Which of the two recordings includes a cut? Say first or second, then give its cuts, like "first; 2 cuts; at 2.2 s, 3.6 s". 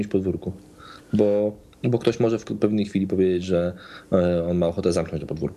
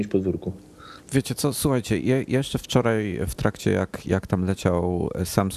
second; 1 cut; at 1.0 s